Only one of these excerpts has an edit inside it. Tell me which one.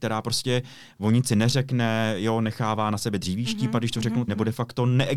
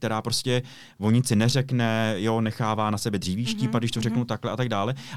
first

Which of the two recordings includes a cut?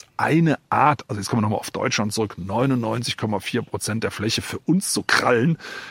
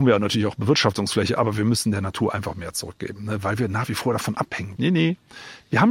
second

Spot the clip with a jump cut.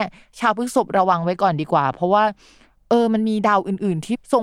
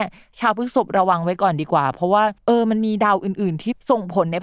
second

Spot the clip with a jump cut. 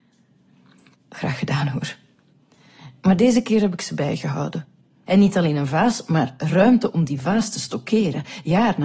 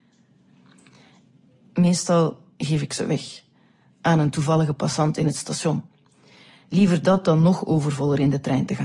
first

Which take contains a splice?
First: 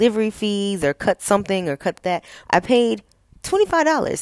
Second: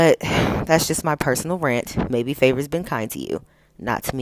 first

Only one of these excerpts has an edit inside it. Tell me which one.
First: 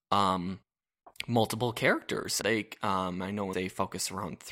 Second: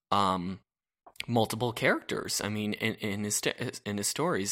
first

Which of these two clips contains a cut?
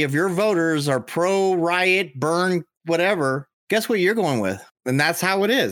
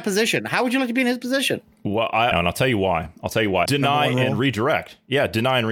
second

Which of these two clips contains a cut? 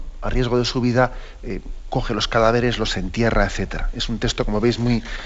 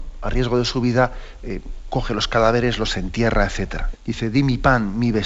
second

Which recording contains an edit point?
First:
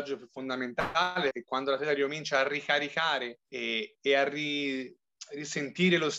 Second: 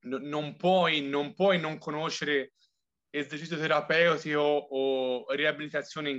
first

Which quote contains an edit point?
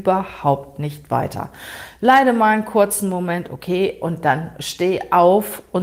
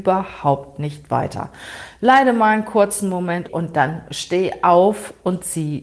second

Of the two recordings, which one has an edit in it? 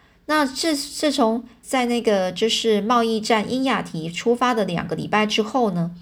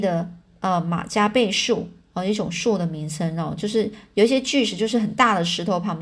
first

